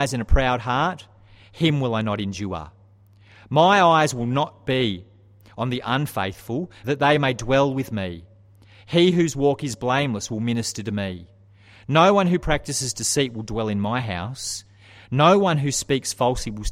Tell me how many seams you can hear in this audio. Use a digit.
1